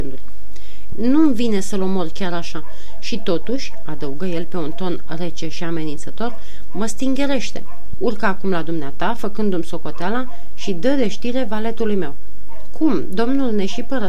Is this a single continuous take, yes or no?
no